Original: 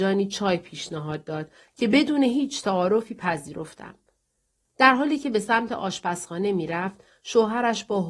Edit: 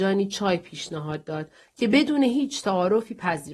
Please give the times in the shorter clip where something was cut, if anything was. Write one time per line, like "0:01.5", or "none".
none